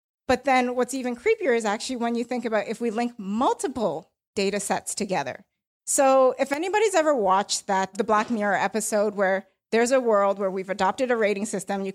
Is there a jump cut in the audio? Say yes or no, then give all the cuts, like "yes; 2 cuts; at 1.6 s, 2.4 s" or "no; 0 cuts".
yes; 2 cuts; at 5.8 s, 7.9 s